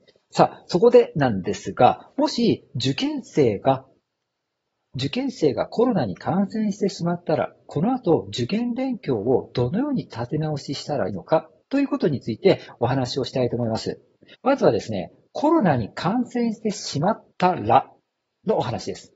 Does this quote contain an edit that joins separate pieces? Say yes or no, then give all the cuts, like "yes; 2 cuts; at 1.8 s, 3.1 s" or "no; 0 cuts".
yes; 3 cuts; at 11.1 s, 14.3 s, 17.3 s